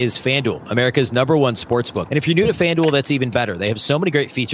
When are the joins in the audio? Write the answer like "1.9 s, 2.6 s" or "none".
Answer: 2.1 s